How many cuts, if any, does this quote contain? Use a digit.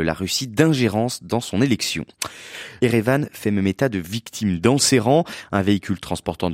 1